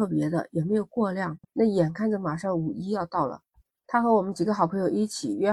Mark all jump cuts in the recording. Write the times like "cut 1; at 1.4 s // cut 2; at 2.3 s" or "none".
cut 1; at 1.5 s